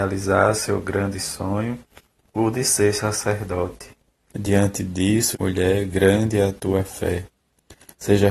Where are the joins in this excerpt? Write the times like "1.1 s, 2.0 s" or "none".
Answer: 4.3 s, 5.3 s